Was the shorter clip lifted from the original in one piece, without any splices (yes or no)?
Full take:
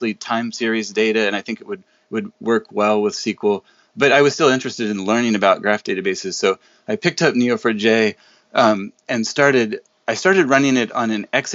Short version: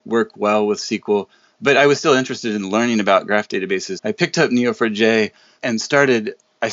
no